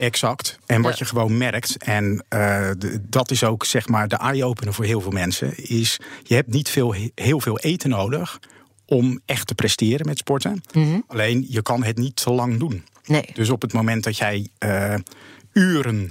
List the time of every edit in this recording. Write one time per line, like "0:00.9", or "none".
none

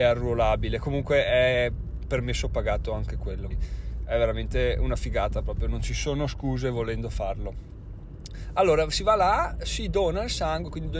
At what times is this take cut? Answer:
0:03.5

